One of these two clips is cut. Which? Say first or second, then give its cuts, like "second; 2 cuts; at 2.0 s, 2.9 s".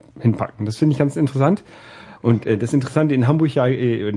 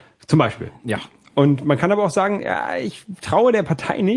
first; 1 cut; at 2.2 s